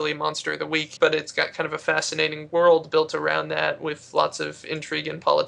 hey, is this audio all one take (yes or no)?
no